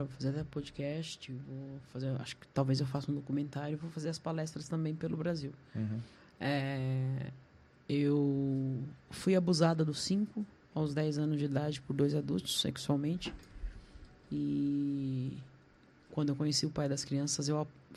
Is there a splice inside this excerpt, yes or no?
no